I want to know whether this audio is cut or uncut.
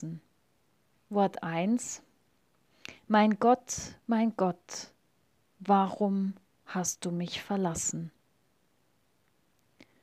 cut